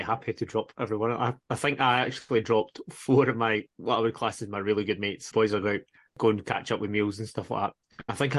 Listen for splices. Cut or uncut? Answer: cut